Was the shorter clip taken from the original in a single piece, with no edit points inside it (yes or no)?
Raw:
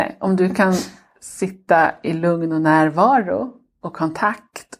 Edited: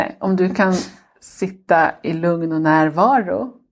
yes